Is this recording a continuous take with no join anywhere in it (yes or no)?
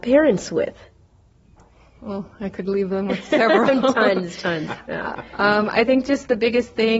yes